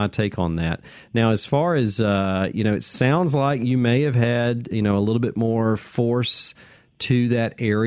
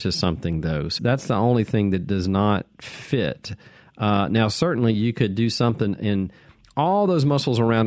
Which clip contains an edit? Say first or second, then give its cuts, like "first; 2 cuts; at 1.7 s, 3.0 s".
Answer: second; 1 cut; at 1.0 s